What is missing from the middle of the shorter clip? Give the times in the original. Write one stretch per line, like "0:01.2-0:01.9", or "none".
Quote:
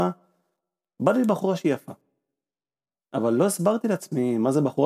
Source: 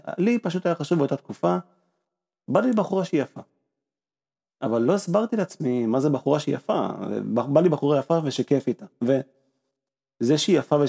none